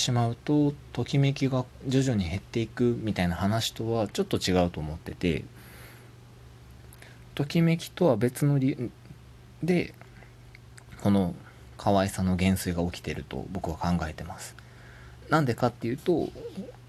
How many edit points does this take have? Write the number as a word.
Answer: zero